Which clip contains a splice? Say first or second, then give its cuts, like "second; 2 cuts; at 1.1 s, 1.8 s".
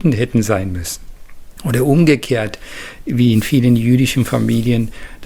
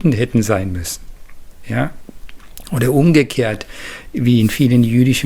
first; 1 cut; at 1.6 s